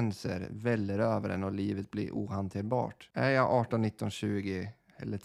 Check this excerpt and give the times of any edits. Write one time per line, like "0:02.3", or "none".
0:03.1